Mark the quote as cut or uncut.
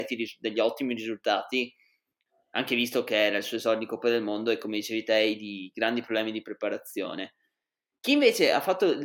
uncut